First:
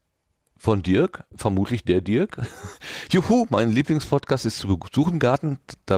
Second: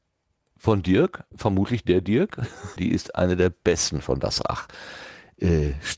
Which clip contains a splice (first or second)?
second